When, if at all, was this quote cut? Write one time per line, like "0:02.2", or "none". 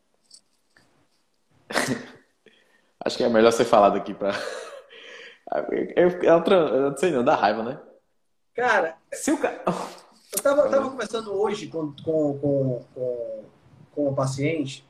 none